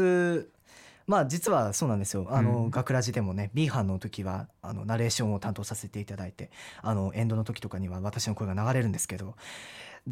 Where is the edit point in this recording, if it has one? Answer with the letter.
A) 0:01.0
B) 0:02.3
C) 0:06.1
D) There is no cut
B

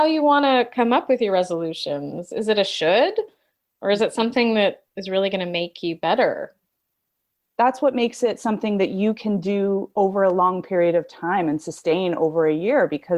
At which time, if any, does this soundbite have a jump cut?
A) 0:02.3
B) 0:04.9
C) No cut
B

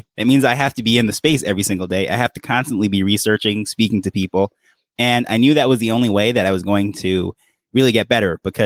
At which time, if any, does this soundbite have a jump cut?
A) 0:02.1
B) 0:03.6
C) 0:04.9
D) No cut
D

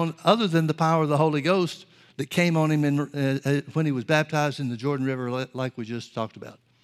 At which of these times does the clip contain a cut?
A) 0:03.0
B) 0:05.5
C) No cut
C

